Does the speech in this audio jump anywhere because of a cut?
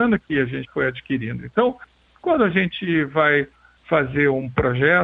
no; 0 cuts

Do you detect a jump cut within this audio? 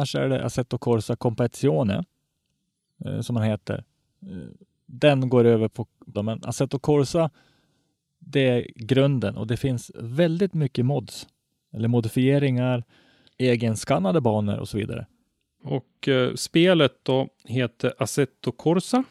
yes; 3 cuts; at 6.1 s, 13.3 s, 15.6 s

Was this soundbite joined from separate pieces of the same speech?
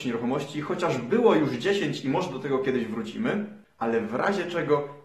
no; 0 cuts

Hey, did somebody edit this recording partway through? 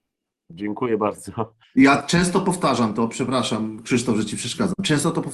yes; 1 cut; at 1.6 s

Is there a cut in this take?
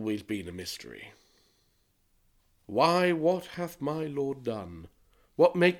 yes; 1 cut; at 2.6 s

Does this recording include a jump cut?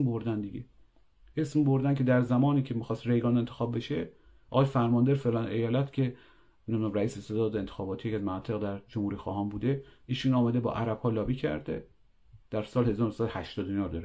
no; 0 cuts

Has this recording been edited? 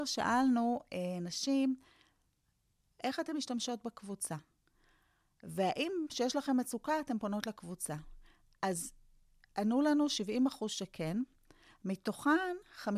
no; 0 cuts

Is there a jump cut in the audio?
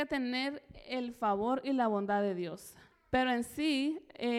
yes; 1 cut; at 2.9 s

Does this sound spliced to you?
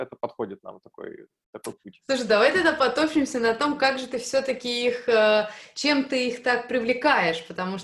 no; 0 cuts

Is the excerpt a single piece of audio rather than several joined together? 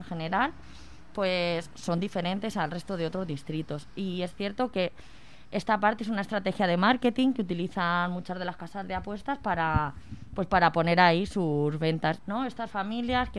no; 2 cuts; at 1.7 s, 12.2 s

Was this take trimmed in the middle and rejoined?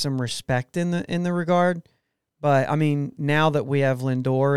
no; 0 cuts

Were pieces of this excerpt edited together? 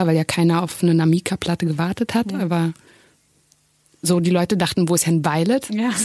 no; 0 cuts

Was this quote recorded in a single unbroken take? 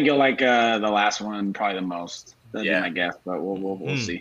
yes; 0 cuts

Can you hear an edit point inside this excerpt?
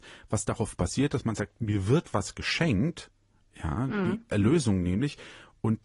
no; 0 cuts

